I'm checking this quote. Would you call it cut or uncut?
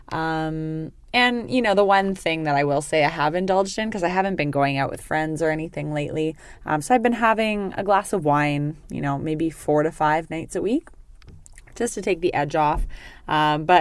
uncut